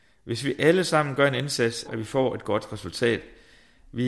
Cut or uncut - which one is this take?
cut